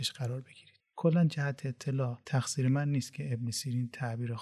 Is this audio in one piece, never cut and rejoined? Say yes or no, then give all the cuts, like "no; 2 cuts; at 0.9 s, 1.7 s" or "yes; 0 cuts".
no; 1 cut; at 2.2 s